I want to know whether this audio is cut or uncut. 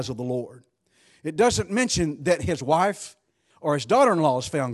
cut